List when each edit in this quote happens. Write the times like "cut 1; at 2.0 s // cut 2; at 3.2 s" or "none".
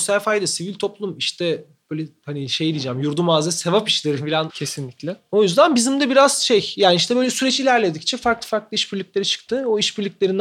cut 1; at 4.5 s